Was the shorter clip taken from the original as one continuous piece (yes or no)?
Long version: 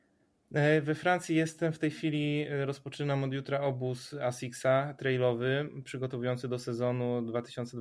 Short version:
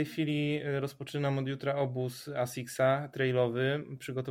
yes